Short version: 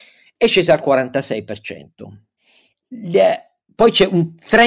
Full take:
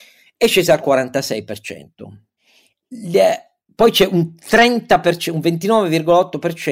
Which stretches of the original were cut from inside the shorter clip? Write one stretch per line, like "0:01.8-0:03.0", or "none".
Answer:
none